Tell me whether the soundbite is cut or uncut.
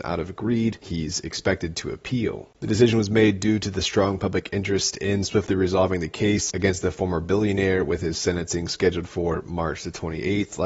cut